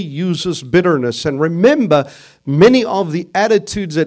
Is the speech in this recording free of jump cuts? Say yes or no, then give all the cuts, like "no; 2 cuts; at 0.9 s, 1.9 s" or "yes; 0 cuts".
yes; 0 cuts